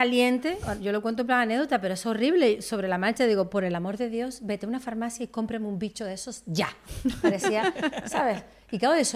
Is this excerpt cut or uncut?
uncut